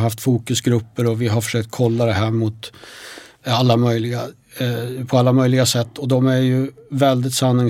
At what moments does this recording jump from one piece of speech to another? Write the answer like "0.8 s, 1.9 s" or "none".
none